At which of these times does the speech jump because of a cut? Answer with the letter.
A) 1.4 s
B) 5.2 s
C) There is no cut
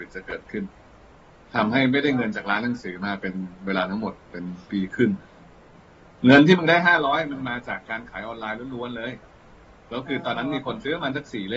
C